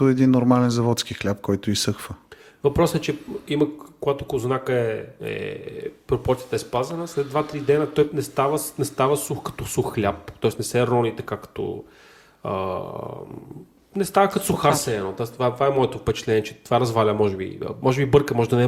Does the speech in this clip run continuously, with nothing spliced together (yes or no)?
yes